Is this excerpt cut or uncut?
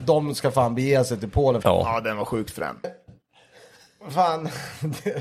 cut